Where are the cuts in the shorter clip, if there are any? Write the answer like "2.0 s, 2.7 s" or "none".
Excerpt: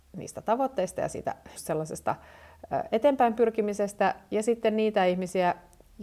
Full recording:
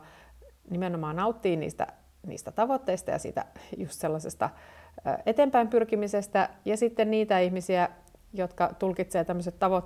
1.6 s